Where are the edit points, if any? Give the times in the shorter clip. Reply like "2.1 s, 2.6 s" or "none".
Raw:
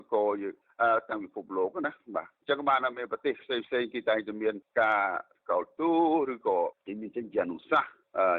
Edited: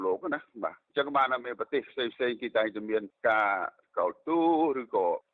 none